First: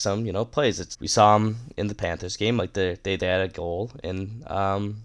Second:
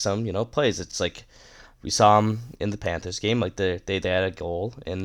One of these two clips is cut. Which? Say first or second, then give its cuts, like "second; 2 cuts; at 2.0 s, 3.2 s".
first; 1 cut; at 0.9 s